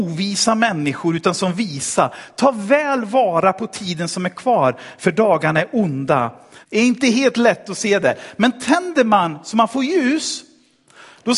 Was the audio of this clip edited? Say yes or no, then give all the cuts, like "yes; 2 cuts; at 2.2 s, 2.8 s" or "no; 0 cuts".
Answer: yes; 1 cut; at 6.6 s